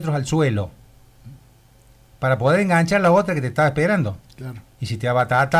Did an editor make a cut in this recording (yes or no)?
yes